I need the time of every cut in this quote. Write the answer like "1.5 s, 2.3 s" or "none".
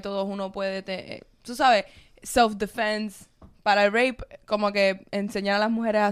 none